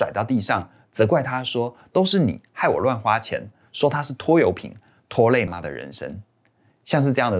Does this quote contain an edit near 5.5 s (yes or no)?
yes